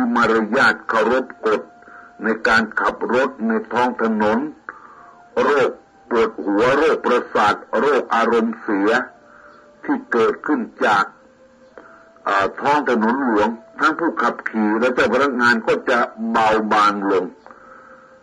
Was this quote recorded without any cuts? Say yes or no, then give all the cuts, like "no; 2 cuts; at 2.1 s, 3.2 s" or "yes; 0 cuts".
no; 1 cut; at 13.7 s